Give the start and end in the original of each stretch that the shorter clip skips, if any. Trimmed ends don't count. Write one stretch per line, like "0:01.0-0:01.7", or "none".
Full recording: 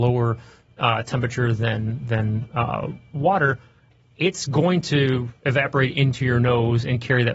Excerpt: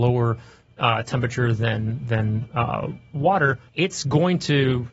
0:03.7-0:04.1